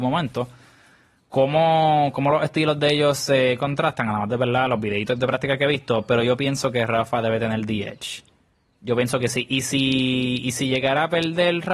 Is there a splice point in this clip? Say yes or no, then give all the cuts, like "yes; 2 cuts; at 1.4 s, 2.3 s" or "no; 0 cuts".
no; 0 cuts